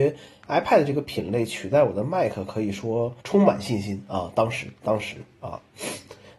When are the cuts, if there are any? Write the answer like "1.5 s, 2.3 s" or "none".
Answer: 3.2 s